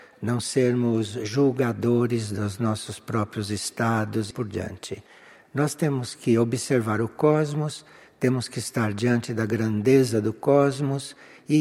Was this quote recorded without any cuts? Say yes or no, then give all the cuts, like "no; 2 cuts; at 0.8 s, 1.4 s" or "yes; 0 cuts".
no; 1 cut; at 4.3 s